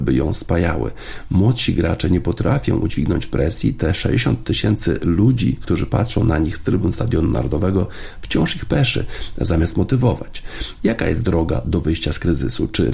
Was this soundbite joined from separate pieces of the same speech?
yes; 1 cut; at 10.8 s

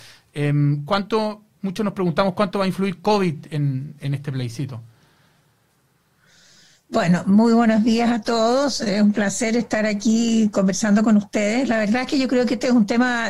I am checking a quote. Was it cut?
no; 0 cuts

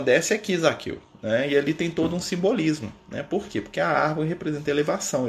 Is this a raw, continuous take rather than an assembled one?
yes; 0 cuts

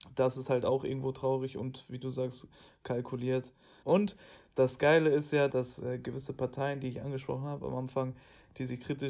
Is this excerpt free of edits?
no; 2 cuts; at 3.8 s, 5.5 s

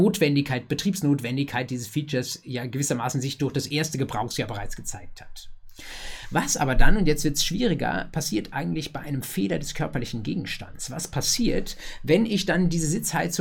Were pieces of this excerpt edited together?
no; 0 cuts

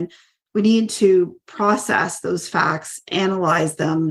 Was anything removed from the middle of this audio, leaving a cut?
no; 0 cuts

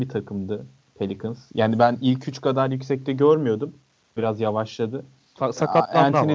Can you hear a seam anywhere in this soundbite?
yes; 1 cut; at 4.2 s

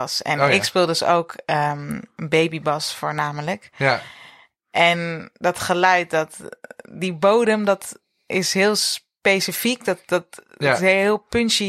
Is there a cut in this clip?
no; 0 cuts

